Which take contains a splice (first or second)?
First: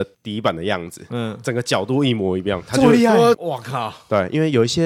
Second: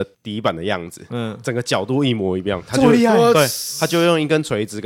first